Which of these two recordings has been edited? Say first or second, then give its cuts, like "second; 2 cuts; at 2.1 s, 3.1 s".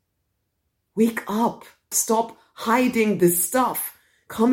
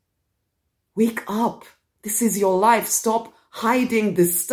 first; 1 cut; at 1.9 s